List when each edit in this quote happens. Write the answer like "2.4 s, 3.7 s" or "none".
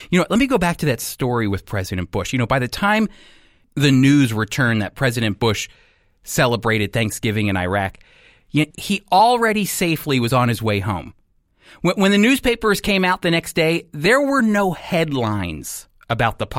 8.7 s